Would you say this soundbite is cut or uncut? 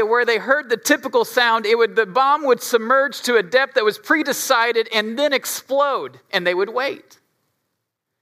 uncut